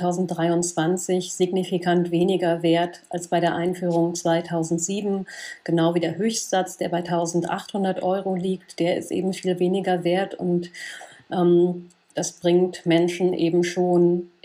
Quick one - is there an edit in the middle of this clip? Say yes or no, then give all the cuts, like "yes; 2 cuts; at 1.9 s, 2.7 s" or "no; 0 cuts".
yes; 1 cut; at 12.1 s